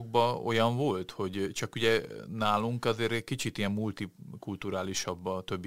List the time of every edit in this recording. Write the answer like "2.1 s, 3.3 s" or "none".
none